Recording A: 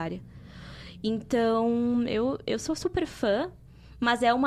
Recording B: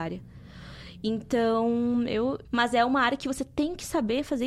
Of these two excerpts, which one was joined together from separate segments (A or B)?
B